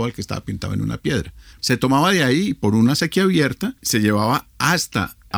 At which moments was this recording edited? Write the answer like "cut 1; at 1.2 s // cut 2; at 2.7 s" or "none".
cut 1; at 1.5 s // cut 2; at 3.8 s